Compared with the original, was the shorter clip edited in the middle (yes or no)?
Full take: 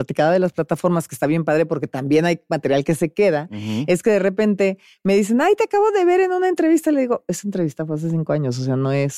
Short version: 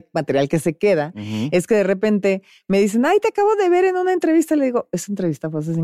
no